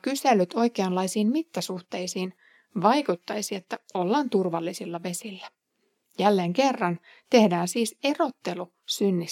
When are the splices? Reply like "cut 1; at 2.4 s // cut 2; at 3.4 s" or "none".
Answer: none